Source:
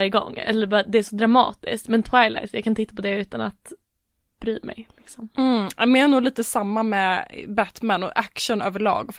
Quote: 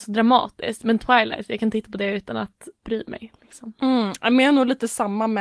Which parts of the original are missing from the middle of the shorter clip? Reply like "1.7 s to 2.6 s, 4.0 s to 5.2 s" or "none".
3.8 s to 4.3 s